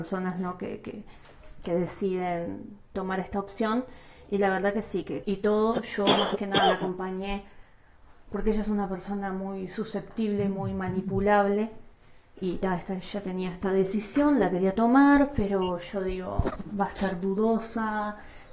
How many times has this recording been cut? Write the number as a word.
one